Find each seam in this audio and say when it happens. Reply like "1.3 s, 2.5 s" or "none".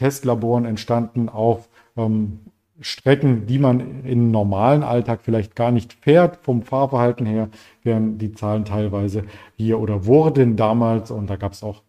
none